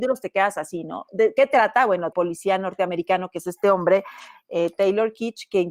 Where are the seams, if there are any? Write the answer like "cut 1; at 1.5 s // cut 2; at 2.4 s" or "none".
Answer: cut 1; at 2.1 s